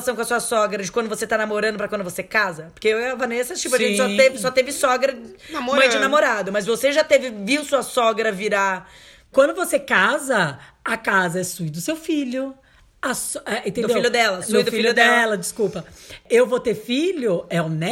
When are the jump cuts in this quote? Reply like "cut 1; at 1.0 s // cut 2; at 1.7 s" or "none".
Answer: cut 1; at 9.3 s